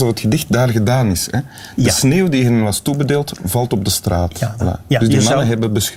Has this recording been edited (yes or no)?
yes